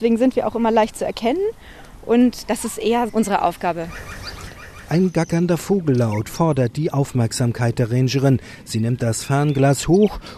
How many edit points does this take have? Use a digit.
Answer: 1